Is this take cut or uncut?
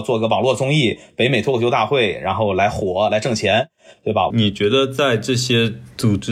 cut